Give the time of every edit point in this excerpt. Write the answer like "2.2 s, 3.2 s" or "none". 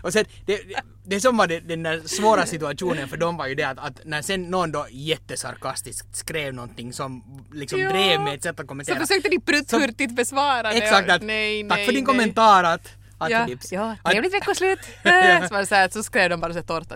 13.5 s